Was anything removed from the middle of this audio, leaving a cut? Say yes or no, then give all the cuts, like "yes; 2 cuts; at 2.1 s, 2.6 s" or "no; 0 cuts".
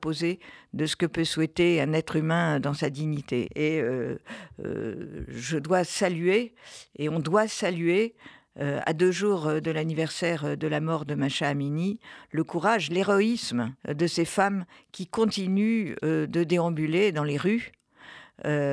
yes; 2 cuts; at 3.4 s, 13.8 s